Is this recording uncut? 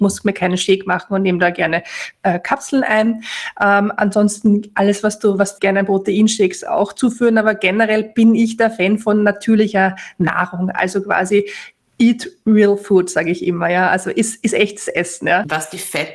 no; 1 cut; at 5.6 s

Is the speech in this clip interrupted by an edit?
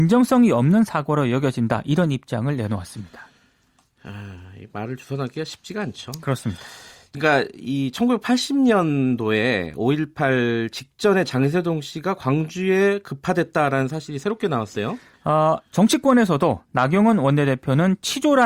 yes; 2 cuts; at 7.1 s, 15.1 s

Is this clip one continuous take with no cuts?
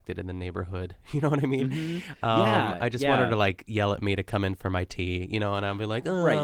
yes; 0 cuts

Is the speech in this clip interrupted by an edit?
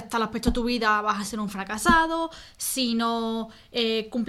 no; 0 cuts

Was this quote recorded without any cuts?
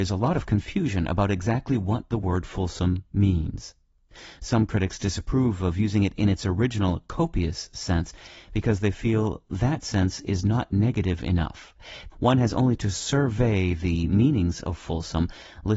no; 1 cut; at 12.1 s

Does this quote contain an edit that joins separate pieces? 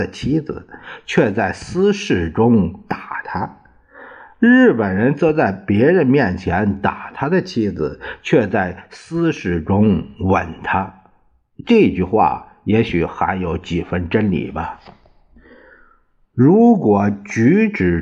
no; 0 cuts

